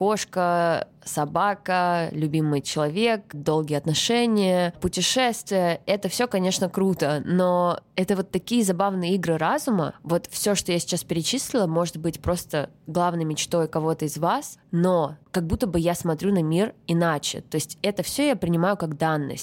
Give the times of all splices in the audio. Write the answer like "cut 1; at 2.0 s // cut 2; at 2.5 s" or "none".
none